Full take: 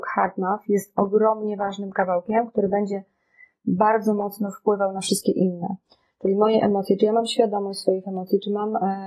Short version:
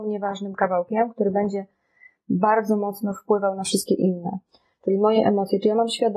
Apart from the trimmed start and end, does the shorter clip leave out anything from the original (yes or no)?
no